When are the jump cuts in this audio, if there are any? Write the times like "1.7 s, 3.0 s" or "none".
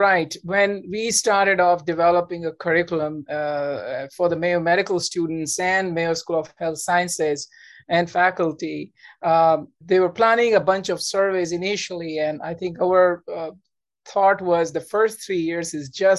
9.8 s

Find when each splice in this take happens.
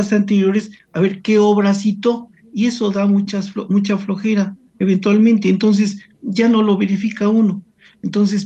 none

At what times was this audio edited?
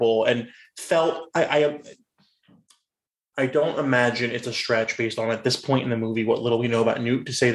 none

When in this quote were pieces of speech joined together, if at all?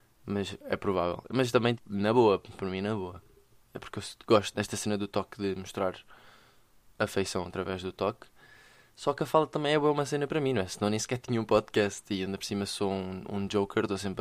1.7 s, 4.5 s

